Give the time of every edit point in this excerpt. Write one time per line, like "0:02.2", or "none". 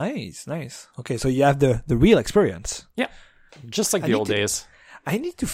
0:03.5

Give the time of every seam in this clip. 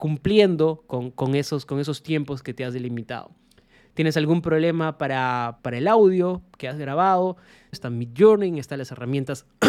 0:05.6
0:07.7

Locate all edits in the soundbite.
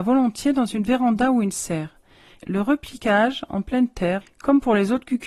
0:02.4
0:04.2

